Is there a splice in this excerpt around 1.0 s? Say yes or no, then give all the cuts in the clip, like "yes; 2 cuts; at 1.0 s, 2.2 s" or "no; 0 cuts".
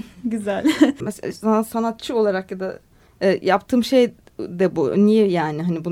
yes; 1 cut; at 1.0 s